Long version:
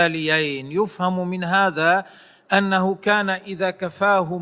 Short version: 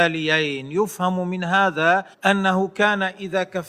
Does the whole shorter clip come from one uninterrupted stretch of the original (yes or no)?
no